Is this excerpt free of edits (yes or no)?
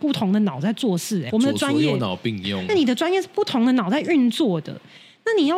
no